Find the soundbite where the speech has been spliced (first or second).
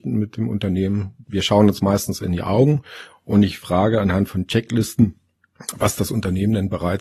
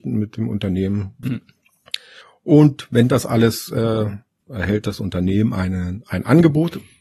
second